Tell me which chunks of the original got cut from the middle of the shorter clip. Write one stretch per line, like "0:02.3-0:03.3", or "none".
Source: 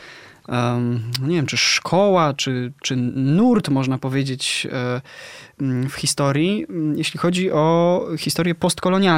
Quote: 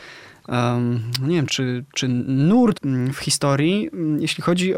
0:01.5-0:02.3
0:03.6-0:05.5